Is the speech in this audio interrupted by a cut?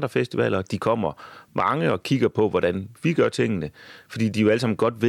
no; 0 cuts

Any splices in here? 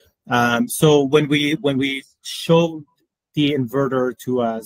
no; 0 cuts

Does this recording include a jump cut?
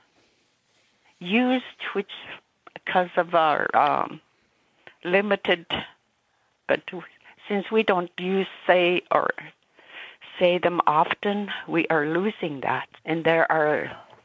yes; 2 cuts; at 6.6 s, 13.0 s

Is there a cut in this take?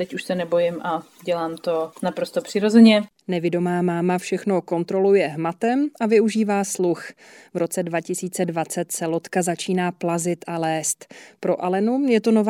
no; 0 cuts

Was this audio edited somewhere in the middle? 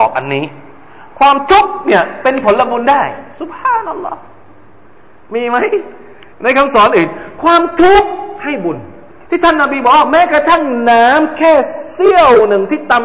yes; 2 cuts; at 6.3 s, 9.3 s

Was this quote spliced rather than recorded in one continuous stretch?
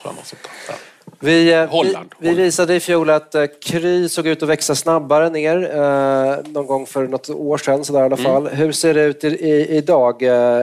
no; 0 cuts

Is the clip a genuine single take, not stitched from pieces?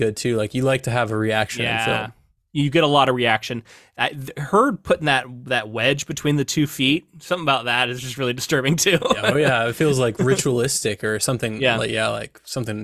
yes; 0 cuts

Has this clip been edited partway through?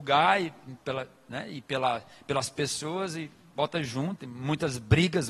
yes; 1 cut; at 4.2 s

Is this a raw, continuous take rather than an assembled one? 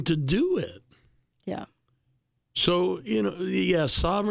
yes; 0 cuts

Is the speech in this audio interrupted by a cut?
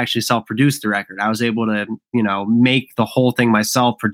no; 0 cuts

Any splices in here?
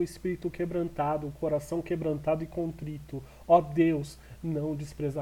no; 0 cuts

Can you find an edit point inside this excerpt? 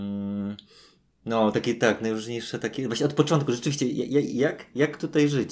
no; 0 cuts

